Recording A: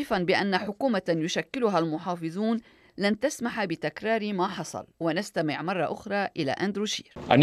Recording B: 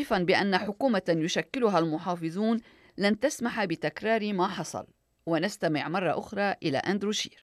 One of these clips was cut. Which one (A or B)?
A